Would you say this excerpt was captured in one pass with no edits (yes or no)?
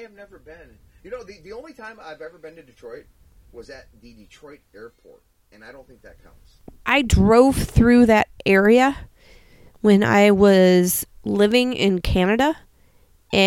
yes